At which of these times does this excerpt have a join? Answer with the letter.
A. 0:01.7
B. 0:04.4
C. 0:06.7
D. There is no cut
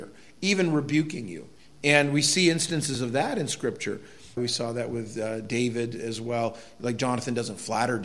B